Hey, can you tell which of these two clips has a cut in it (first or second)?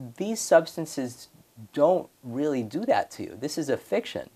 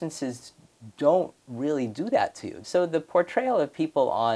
second